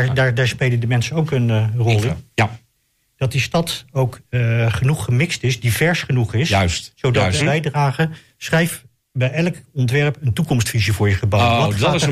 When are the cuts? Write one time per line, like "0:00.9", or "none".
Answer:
0:07.4